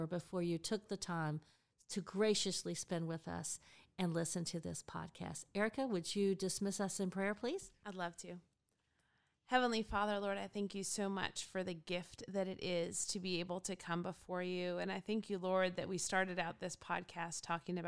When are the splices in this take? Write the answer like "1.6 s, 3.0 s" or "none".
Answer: none